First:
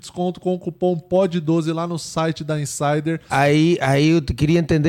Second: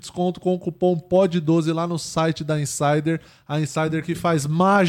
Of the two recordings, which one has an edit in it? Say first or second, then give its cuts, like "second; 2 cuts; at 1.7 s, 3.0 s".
first; 1 cut; at 3.3 s